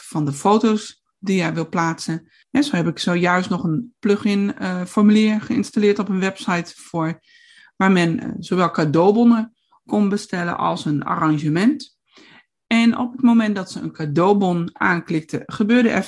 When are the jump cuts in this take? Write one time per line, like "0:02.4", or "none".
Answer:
0:02.4

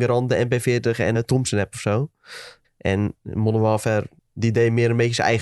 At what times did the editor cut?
0:01.1
0:02.6
0:04.2

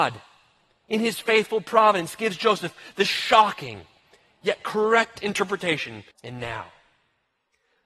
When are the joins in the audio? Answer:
0:06.1

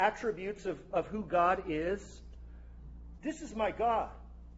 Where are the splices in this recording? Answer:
0:03.2

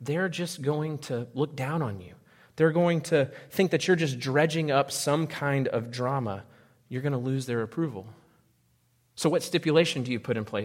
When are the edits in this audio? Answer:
none

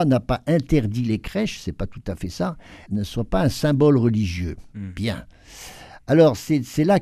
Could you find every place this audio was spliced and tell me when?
0:02.9

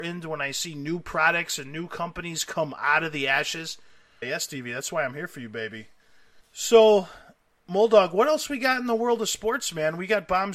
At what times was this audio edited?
0:04.2
0:06.4

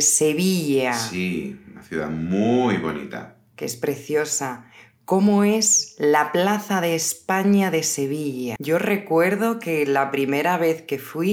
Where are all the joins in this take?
0:08.6

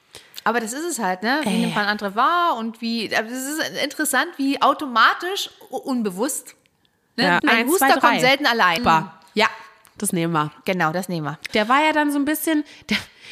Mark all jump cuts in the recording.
0:07.4
0:08.8
0:11.5

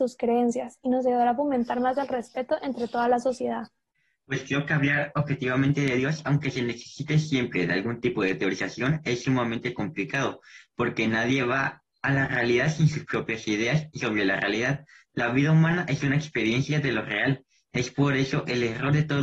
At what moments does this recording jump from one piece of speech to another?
none

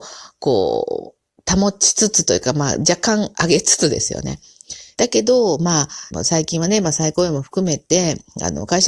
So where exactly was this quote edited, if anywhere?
0:05.0
0:06.1

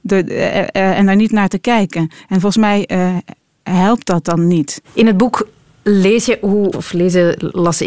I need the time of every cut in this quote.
0:04.8
0:06.7

